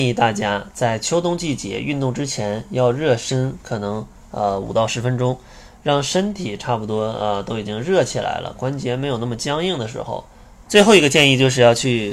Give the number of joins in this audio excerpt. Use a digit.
1